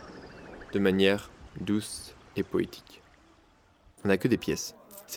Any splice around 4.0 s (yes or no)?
yes